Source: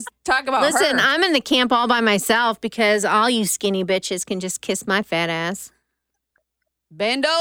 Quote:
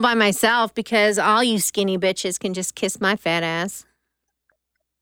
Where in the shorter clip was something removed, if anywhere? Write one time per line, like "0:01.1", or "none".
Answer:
none